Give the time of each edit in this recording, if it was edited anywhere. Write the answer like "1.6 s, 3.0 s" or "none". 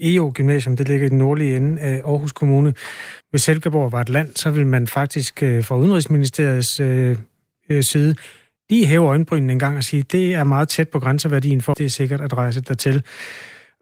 3.2 s, 11.7 s